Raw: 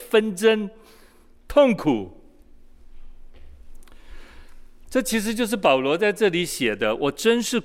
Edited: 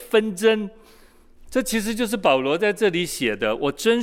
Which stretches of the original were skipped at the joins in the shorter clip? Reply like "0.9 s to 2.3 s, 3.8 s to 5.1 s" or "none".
1.4 s to 4.8 s

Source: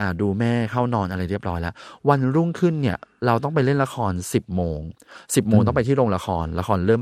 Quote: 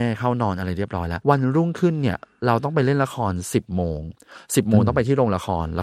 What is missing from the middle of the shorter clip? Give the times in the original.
1.7 s to 2.0 s

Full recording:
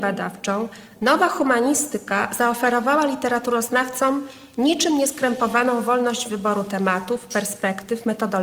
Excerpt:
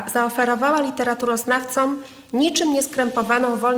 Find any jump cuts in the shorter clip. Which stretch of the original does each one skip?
none

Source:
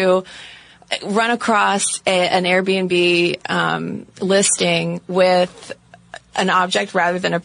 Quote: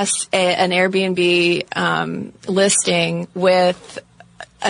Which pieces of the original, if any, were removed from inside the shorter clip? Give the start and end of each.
none

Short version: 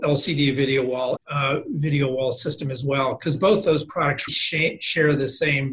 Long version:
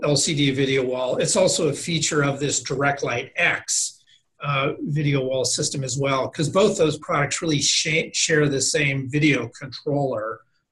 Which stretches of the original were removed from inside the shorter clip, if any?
1.2 s to 4.3 s, 7.4 s to 7.6 s

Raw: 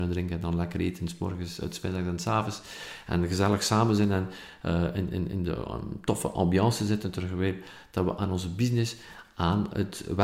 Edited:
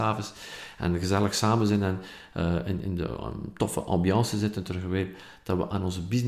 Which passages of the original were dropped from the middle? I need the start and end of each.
5.1 s to 5.3 s

